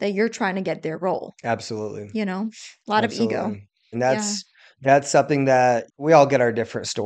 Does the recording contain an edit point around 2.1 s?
no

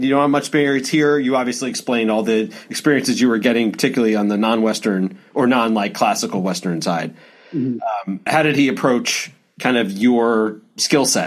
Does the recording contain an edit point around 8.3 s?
yes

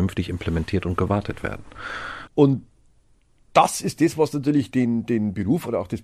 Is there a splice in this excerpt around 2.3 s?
yes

